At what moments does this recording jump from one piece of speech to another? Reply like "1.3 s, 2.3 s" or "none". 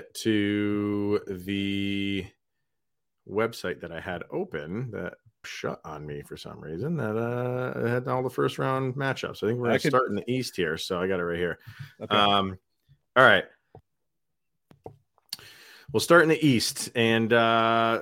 5.4 s